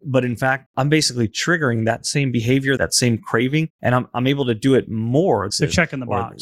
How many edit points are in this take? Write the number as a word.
two